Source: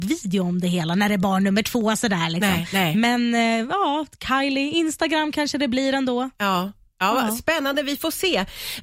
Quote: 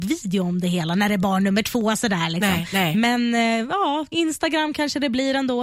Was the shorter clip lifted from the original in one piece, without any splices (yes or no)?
no